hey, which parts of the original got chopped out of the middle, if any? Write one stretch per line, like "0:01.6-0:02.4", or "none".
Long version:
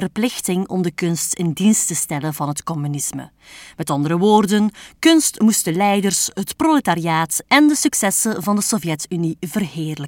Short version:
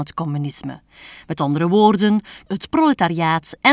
0:05.0-0:06.3